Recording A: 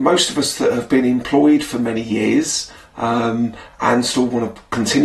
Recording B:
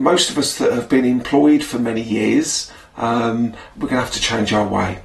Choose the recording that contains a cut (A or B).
B